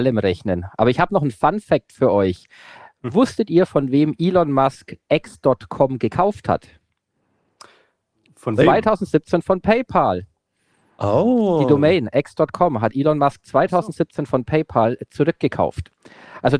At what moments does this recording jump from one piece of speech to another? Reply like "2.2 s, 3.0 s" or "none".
none